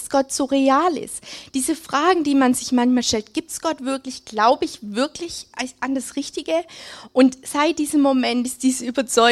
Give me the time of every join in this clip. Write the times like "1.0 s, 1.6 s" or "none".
none

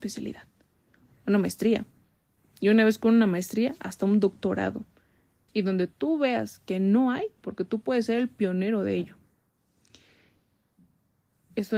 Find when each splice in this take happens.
5.5 s, 7.4 s

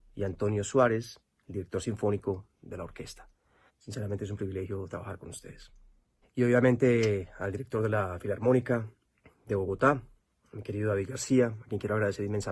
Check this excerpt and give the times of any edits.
3.7 s, 6.2 s

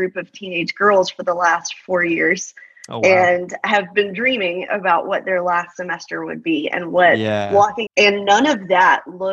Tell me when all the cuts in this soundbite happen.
7.9 s

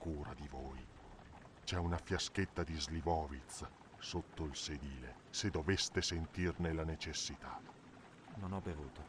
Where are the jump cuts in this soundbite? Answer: none

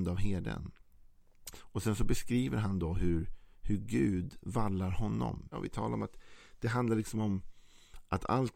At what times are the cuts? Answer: 1.5 s, 5.5 s

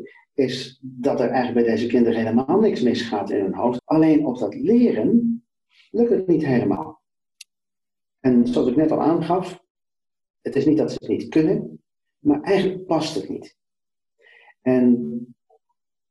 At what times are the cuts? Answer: 3.8 s

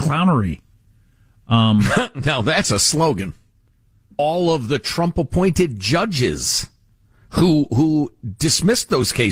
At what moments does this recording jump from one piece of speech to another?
4.2 s

